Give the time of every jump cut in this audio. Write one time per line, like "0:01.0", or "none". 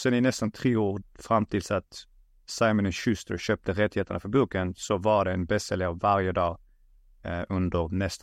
0:01.0